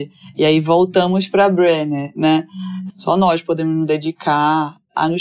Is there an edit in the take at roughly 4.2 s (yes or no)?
no